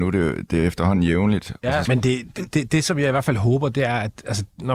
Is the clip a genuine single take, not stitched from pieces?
no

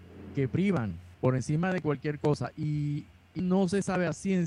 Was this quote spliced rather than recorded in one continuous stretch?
yes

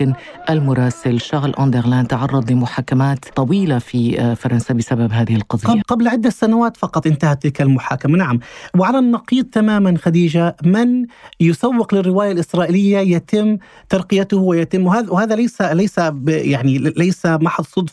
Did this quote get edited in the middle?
yes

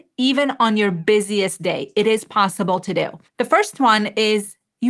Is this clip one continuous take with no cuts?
no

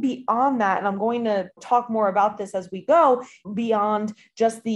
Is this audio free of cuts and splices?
no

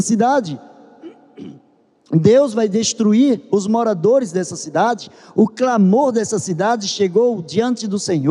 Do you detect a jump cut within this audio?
no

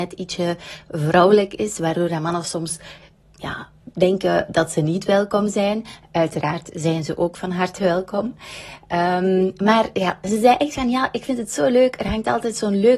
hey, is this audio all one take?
yes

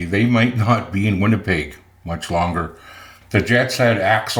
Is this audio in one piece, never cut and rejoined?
no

